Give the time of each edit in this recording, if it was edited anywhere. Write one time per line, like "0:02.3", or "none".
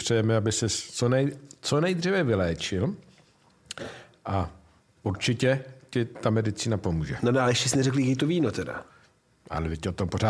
none